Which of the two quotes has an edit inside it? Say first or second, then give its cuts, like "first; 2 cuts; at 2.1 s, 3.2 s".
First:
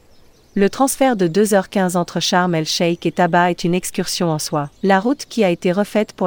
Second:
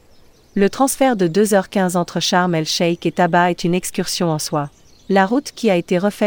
first; 1 cut; at 4.8 s